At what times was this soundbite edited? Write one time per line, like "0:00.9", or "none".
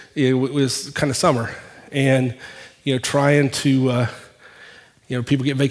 none